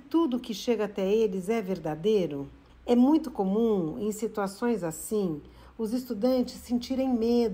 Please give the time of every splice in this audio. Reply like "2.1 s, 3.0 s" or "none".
2.7 s